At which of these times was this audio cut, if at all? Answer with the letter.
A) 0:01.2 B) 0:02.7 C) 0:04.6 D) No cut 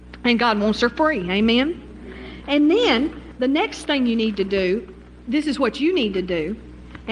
D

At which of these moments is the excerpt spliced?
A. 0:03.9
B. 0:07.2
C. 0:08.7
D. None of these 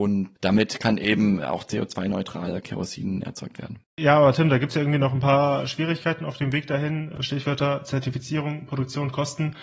A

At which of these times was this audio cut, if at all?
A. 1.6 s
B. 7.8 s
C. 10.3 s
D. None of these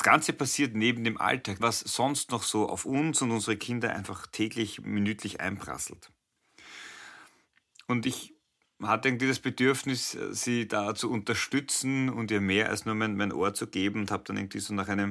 A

